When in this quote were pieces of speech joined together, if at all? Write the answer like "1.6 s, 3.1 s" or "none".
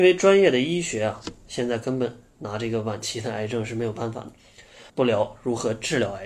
4.9 s